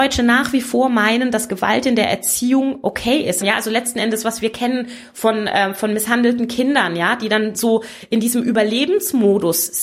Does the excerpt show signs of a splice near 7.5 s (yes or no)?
no